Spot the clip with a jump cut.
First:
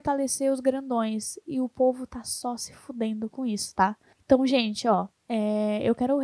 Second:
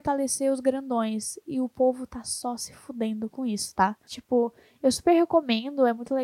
second; 1 cut; at 4.1 s

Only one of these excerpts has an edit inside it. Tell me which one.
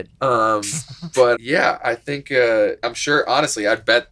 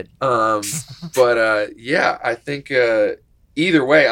first; 2 cuts; at 1.3 s, 2.8 s

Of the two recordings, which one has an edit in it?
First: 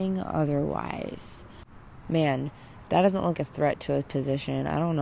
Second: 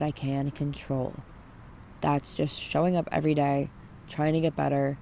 first; 2 cuts; at 2.0 s, 3.3 s

